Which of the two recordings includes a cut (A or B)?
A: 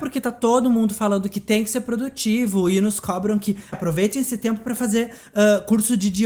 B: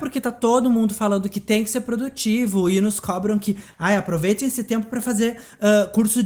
A